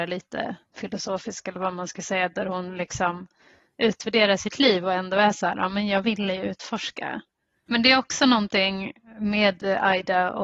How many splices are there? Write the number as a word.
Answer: one